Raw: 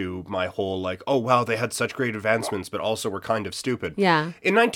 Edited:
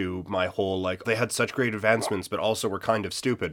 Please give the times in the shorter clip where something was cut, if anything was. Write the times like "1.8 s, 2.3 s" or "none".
1.0 s